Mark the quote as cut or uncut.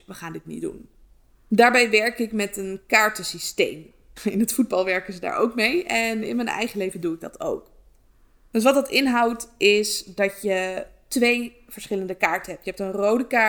uncut